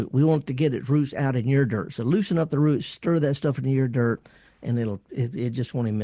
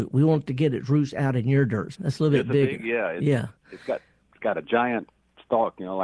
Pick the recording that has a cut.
second; 1 cut; at 1.9 s

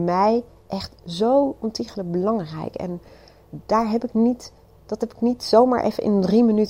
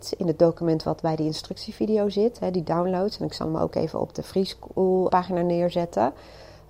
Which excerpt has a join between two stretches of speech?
second; 1 cut; at 5.1 s

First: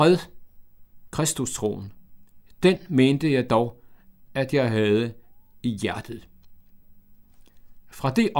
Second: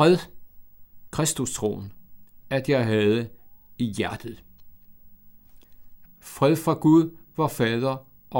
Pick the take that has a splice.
second; 2 cuts; at 2.4 s, 6.0 s

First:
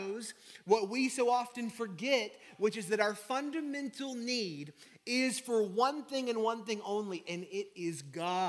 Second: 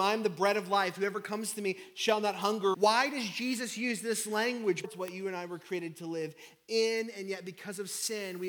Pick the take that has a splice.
second; 2 cuts; at 2.7 s, 4.8 s

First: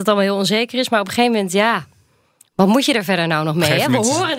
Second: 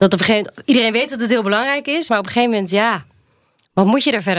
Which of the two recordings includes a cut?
second; 1 cut; at 2.1 s

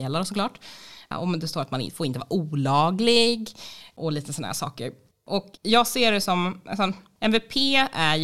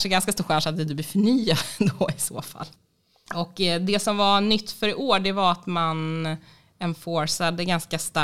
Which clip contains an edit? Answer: first; 1 cut; at 5.6 s

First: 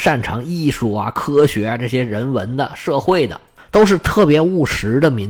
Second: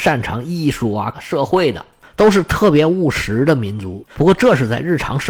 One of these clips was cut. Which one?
second; 2 cuts; at 1.1 s, 4.1 s

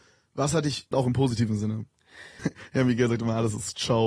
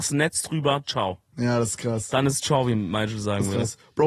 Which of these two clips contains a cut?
first; 2 cuts; at 0.9 s, 2.4 s

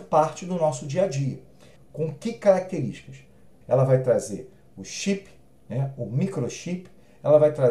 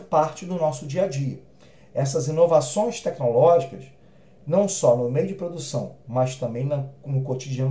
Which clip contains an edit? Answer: first; 2 cuts; at 1.8 s, 3.6 s

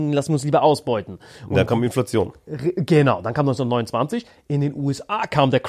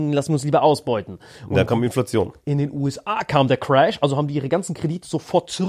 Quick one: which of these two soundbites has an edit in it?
second; 1 cut; at 2.4 s

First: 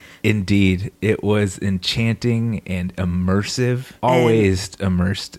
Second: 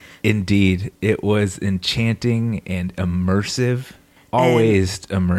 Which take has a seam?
first; 1 cut; at 4.0 s

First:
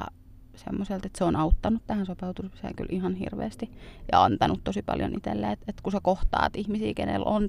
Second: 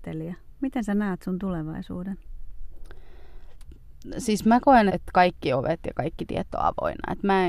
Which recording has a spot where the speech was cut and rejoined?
second; 1 cut; at 4.9 s

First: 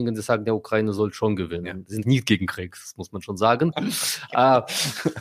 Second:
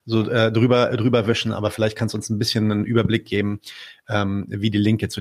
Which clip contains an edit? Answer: first; 2 cuts; at 2.0 s, 3.7 s

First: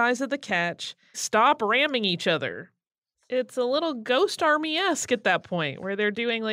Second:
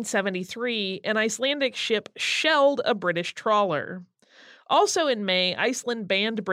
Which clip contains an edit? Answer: first; 2 cuts; at 1.1 s, 3.1 s

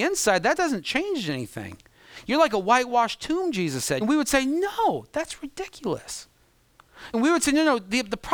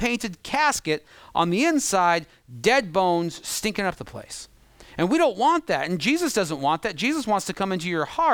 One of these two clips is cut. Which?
first; 2 cuts; at 4.0 s, 7.1 s

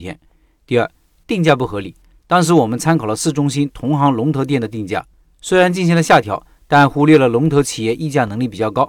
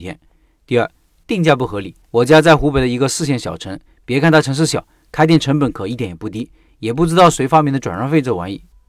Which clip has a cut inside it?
second; 1 cut; at 2.0 s

